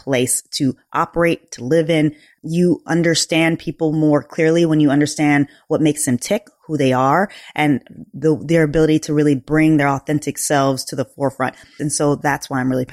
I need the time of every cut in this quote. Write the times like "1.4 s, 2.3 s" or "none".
11.8 s